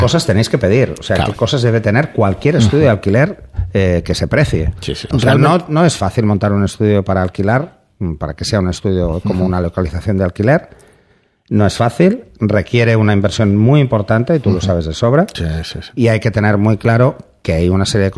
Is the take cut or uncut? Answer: cut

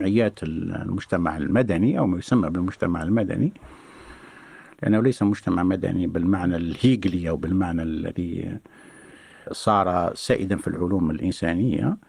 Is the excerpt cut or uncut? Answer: uncut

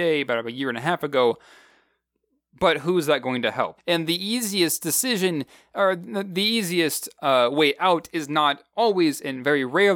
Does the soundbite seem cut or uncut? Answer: cut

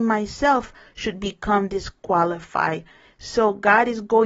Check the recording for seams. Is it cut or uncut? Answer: uncut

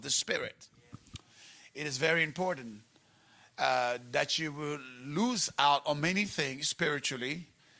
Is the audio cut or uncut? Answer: uncut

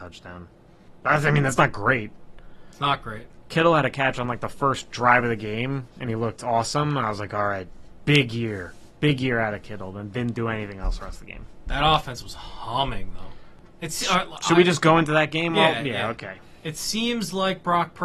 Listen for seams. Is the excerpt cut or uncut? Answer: uncut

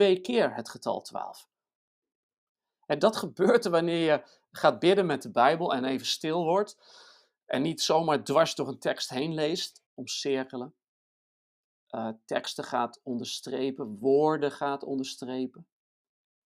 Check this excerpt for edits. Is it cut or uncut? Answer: cut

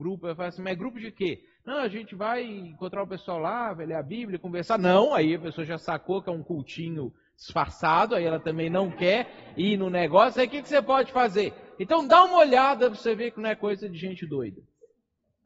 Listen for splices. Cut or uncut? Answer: uncut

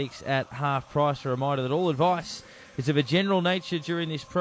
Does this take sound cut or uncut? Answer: uncut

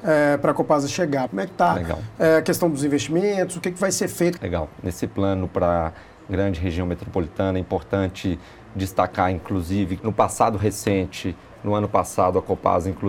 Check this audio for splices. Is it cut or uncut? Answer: cut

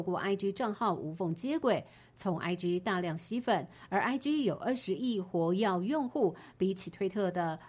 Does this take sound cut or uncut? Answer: uncut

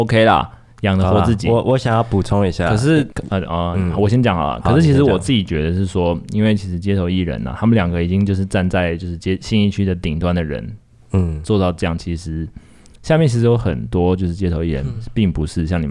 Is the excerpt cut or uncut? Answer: cut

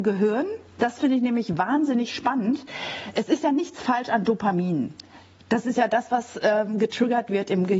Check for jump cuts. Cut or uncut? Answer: uncut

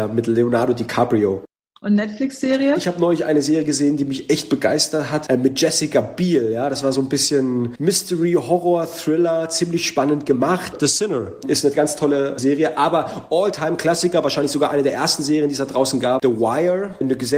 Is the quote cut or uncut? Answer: uncut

